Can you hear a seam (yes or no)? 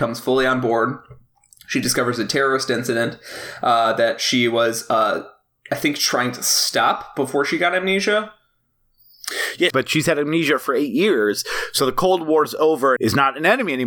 yes